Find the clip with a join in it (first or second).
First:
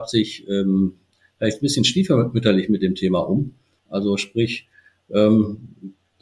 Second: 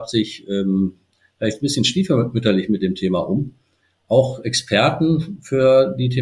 first